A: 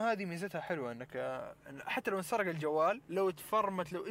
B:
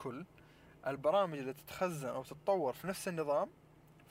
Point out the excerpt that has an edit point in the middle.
A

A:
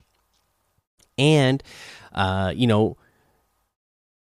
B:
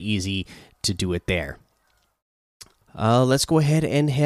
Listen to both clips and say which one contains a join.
B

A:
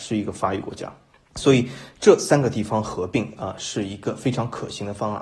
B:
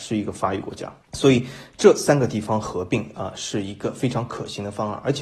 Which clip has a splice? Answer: B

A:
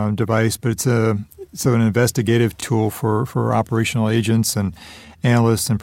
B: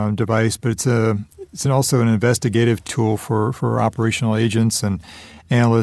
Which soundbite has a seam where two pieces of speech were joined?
A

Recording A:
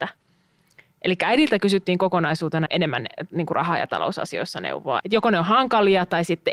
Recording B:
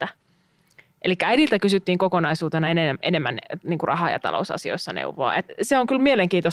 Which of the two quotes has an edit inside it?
A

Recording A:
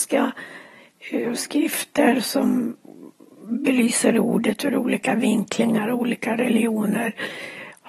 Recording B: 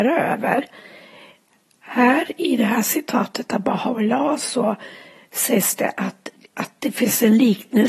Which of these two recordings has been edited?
B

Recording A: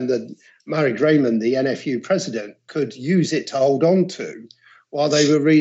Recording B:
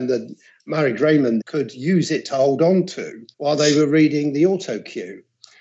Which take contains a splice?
B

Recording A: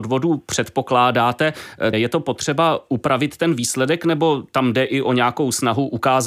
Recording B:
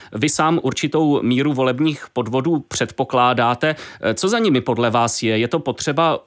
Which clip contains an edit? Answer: A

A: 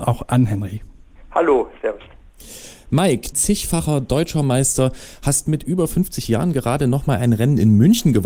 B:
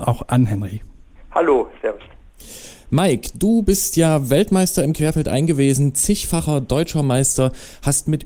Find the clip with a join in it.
A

